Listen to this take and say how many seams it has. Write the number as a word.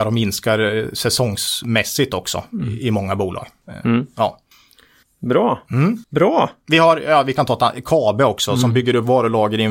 one